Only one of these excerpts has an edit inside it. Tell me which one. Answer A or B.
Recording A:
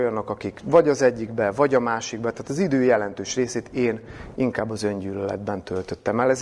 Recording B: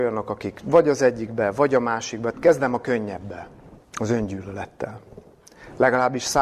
B